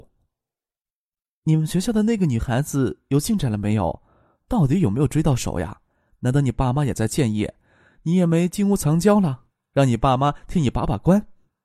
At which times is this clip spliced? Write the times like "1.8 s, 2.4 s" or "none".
none